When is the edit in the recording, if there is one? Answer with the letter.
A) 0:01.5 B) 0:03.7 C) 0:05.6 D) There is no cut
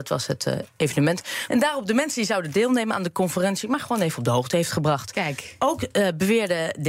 A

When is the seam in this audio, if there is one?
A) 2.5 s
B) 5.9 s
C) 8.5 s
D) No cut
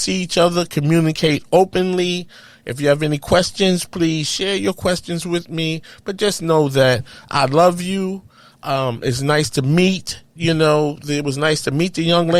D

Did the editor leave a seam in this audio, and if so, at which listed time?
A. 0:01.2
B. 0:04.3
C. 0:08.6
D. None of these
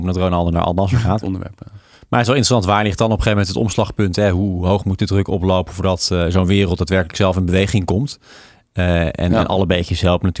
A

